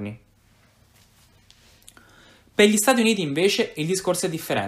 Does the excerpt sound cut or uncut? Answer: uncut